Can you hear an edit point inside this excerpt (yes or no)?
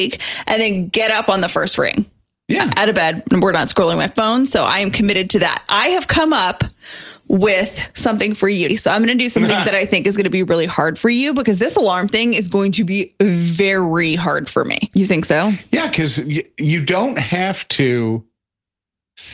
yes